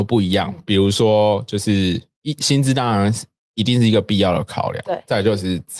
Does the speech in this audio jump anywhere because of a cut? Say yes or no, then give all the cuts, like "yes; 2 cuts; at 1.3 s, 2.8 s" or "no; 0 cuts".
no; 0 cuts